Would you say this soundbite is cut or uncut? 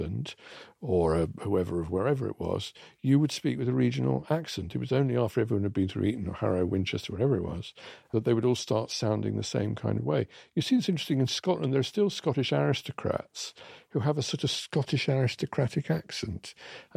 uncut